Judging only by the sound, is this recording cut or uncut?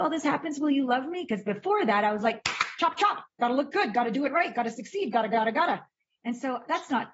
uncut